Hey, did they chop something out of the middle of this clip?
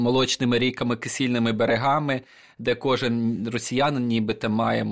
no; 0 cuts

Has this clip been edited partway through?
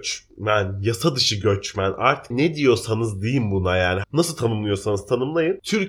yes; 2 cuts; at 2.3 s, 4.0 s

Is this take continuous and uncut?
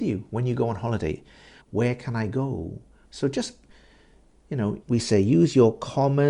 no; 3 cuts; at 1.6 s, 3.0 s, 4.8 s

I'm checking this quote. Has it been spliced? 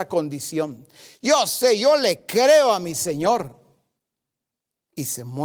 no; 0 cuts

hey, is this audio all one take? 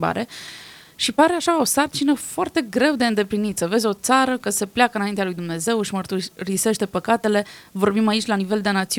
yes; 0 cuts

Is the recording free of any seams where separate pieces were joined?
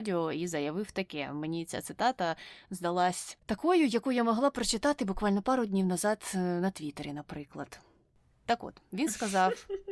yes; 0 cuts

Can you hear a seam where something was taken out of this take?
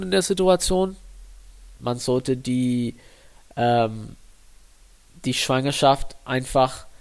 yes; 1 cut; at 1.7 s

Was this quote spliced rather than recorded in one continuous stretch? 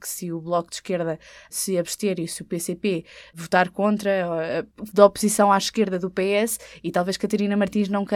yes; 1 cut; at 4.9 s

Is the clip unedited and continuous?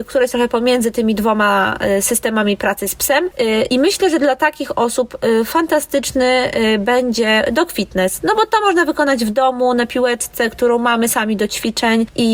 yes; 0 cuts

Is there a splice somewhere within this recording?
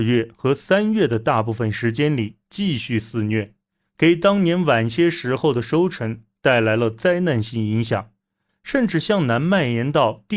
yes; 1 cut; at 8.5 s

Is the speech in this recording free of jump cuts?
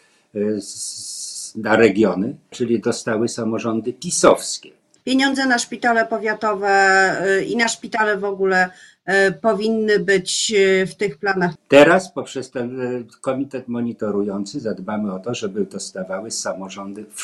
no; 3 cuts; at 2.5 s, 5.0 s, 11.6 s

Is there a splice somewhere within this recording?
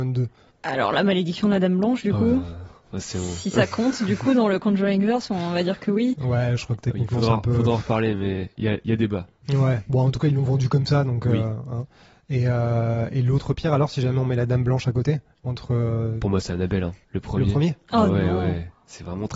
no; 0 cuts

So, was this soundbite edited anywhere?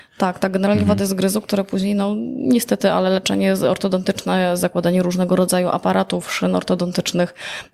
no; 0 cuts

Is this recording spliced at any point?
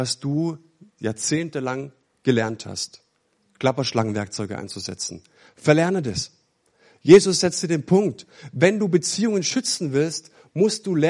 no; 0 cuts

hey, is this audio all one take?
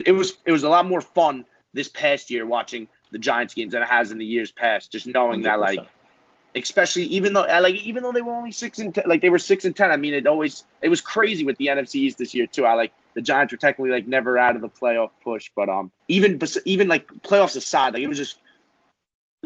no; 1 cut; at 16.0 s

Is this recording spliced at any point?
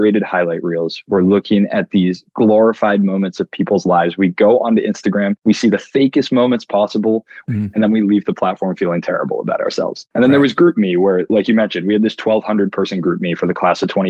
yes; 1 cut; at 7.4 s

